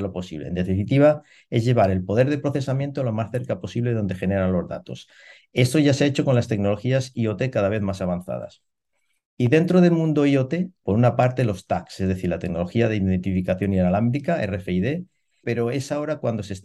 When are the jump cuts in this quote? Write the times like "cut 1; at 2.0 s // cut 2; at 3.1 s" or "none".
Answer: cut 1; at 10.8 s // cut 2; at 15.4 s